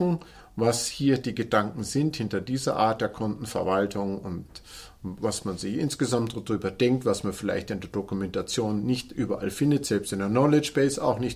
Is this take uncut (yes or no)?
yes